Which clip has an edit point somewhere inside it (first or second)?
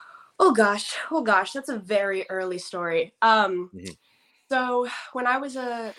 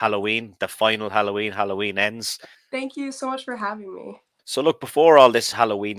second